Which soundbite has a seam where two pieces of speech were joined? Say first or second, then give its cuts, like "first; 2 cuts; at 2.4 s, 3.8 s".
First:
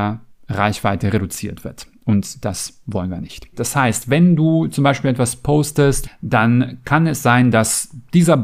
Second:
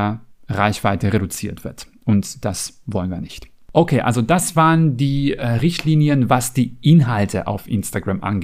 first; 2 cuts; at 3.5 s, 6.0 s